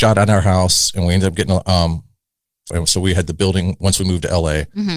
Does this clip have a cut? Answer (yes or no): yes